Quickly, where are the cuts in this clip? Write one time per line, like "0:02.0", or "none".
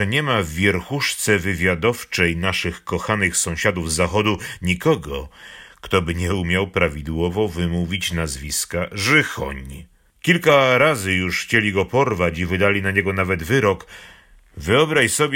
0:10.1